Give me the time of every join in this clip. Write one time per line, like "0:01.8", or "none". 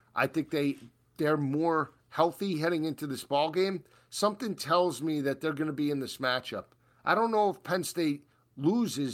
none